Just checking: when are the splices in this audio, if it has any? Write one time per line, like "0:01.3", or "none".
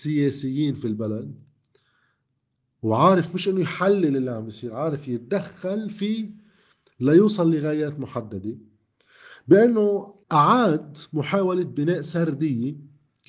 0:10.2